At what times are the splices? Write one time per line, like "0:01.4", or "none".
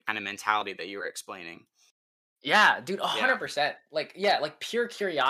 none